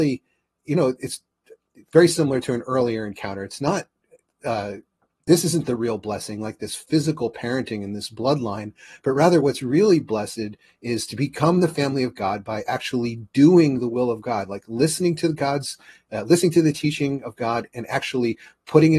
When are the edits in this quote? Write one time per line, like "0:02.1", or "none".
none